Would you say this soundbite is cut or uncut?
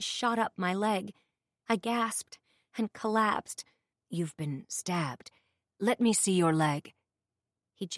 cut